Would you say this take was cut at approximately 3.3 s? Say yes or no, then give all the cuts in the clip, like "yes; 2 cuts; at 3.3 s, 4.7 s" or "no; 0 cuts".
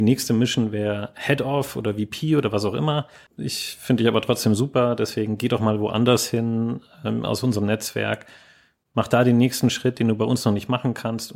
yes; 1 cut; at 3.3 s